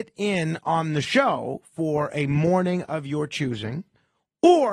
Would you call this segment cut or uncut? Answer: uncut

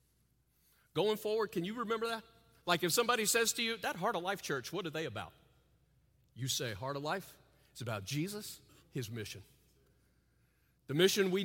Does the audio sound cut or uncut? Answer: cut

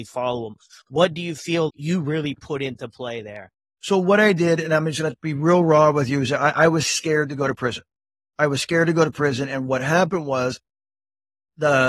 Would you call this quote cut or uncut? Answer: cut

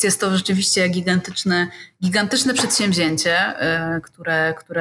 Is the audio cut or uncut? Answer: uncut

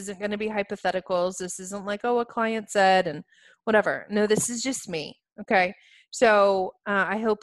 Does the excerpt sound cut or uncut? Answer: uncut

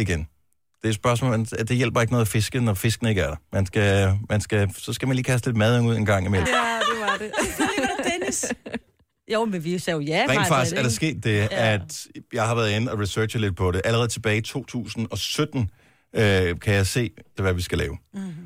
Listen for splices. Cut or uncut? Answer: cut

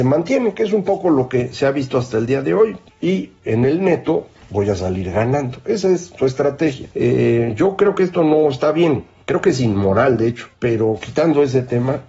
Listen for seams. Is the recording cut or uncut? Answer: cut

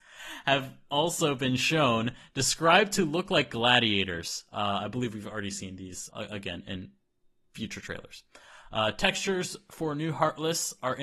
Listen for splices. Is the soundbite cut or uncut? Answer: cut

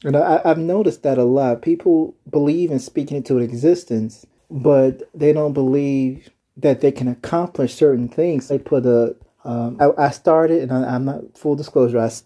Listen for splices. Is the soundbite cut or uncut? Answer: cut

